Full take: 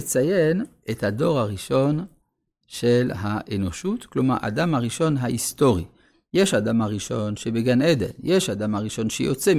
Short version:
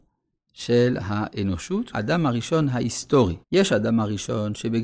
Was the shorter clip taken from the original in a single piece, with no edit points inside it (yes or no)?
no